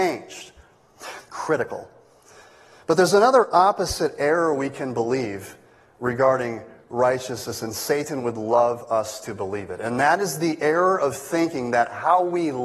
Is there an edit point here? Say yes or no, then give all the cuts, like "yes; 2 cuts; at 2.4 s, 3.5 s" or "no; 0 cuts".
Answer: yes; 1 cut; at 1.2 s